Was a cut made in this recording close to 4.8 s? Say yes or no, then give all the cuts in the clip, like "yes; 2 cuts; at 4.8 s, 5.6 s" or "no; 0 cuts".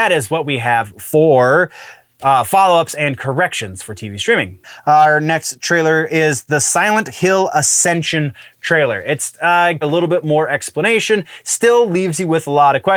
no; 1 cut; at 9.8 s